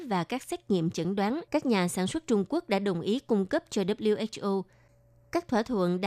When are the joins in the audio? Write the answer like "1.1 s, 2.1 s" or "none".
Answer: 1.5 s